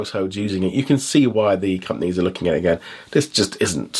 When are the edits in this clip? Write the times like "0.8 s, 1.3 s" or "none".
none